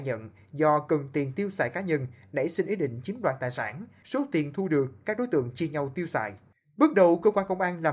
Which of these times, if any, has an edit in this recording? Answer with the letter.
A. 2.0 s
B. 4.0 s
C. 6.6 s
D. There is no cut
B